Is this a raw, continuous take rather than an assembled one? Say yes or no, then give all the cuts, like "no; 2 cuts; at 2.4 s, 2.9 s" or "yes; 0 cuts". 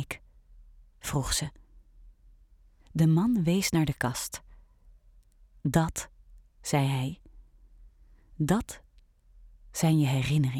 yes; 0 cuts